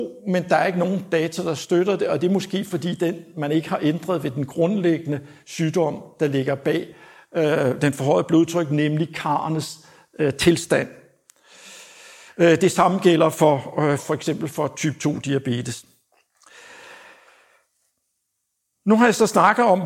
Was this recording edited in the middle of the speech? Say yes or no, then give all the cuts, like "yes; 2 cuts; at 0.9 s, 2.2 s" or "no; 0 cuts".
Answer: yes; 1 cut; at 14.0 s